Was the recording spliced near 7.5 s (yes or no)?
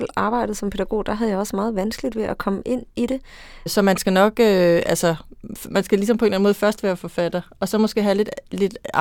no